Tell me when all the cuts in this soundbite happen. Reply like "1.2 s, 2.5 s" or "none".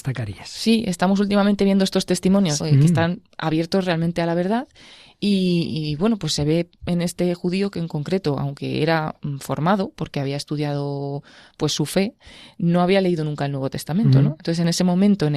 2.6 s